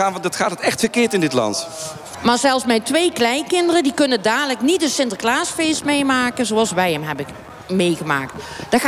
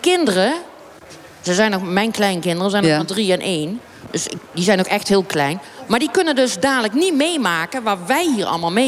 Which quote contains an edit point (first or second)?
first